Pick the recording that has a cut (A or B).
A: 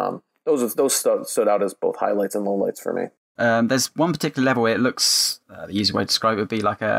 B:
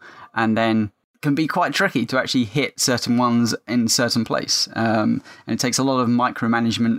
A